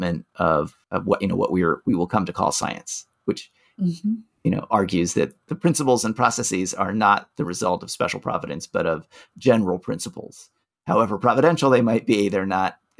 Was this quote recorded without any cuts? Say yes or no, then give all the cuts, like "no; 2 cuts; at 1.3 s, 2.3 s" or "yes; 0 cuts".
yes; 0 cuts